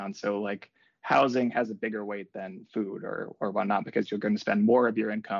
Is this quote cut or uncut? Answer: uncut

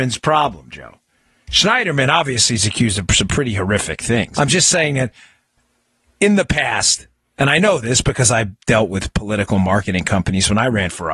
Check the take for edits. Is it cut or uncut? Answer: cut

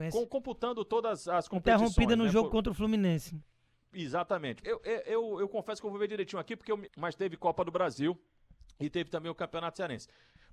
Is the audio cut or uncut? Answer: cut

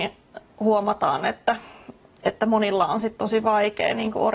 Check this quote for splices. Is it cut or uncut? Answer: uncut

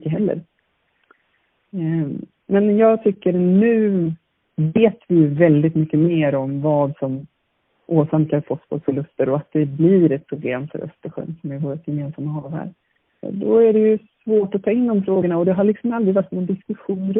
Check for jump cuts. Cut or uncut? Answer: cut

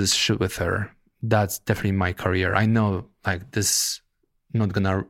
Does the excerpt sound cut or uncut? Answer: uncut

